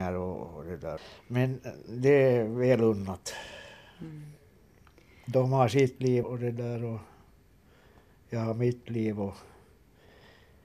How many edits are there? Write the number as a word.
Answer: two